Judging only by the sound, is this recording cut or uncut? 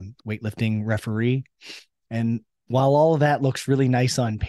uncut